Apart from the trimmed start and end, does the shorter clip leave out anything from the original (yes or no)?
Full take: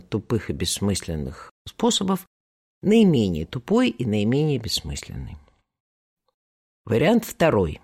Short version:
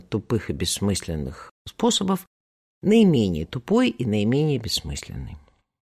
no